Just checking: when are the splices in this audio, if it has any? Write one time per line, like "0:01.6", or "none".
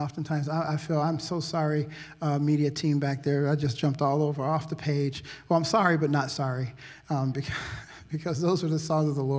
none